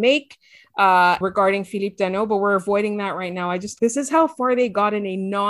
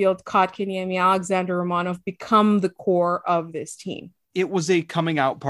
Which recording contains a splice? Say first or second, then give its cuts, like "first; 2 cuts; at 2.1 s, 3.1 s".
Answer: first; 2 cuts; at 1.2 s, 3.8 s